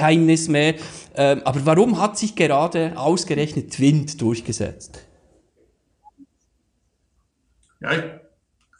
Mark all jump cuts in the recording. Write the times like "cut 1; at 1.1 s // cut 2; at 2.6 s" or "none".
none